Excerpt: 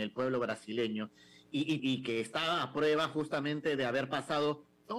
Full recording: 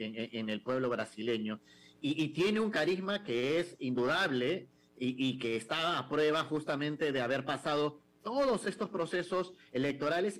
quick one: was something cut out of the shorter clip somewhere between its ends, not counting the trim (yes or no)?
yes